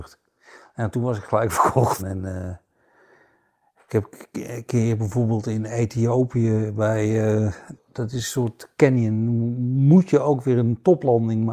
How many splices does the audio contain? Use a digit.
2